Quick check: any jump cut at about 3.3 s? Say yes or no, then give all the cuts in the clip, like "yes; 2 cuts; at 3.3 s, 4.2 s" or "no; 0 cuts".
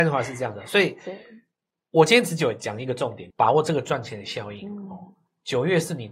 yes; 1 cut; at 3.3 s